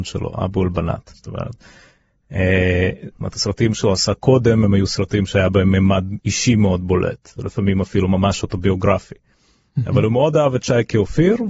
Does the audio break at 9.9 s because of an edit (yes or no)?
no